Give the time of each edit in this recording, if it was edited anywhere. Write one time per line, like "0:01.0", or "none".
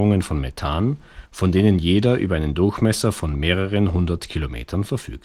0:01.3